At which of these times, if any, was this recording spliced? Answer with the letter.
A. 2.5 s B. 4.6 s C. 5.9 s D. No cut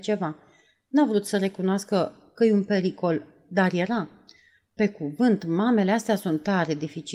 B